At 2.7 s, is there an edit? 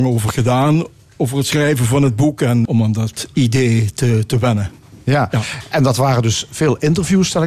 yes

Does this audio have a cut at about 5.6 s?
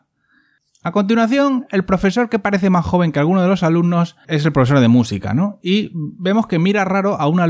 no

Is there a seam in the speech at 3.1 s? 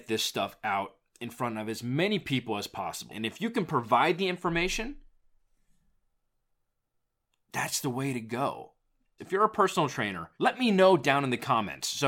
yes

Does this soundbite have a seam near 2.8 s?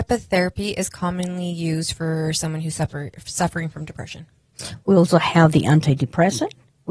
no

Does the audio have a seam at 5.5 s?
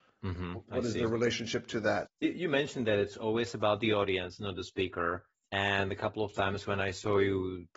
no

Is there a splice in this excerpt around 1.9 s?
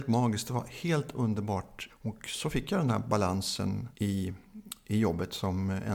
yes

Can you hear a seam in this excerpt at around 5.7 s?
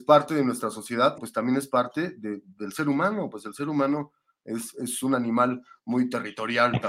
no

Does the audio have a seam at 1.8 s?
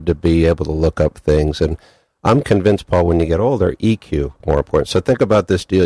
no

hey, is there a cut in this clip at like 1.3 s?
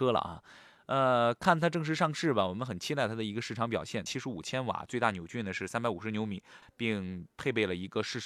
no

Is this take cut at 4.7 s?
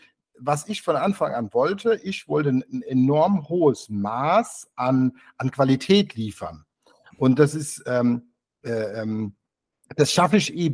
no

